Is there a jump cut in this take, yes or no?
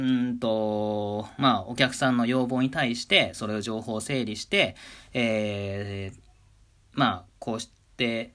no